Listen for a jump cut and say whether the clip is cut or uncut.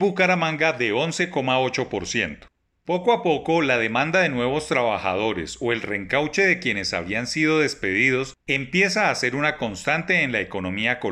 uncut